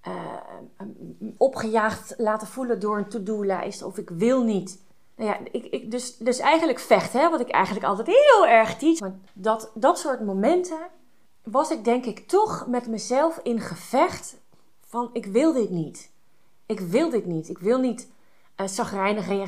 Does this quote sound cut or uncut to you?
cut